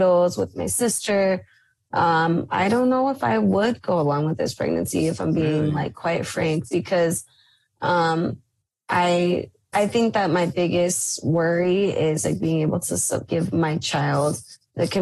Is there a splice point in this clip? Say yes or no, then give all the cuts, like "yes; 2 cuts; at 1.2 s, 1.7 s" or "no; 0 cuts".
yes; 2 cuts; at 9.7 s, 13.3 s